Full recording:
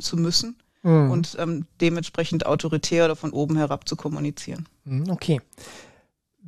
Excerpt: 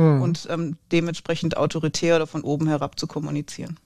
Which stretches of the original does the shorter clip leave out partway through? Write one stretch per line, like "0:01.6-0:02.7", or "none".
none